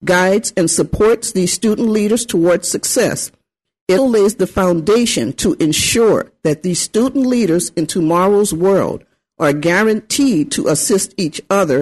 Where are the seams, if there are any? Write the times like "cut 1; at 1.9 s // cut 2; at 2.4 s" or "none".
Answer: cut 1; at 4.0 s